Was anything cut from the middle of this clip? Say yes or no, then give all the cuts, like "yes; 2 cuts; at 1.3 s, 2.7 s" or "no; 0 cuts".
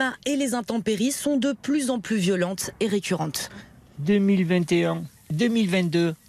yes; 1 cut; at 5.2 s